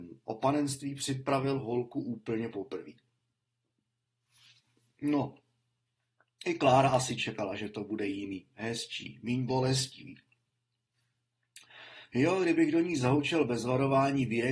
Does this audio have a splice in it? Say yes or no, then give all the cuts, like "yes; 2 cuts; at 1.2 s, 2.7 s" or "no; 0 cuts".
no; 0 cuts